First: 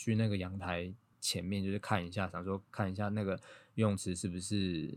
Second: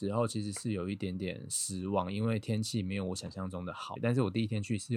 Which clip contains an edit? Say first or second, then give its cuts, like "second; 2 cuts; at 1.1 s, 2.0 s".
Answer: second; 1 cut; at 4.0 s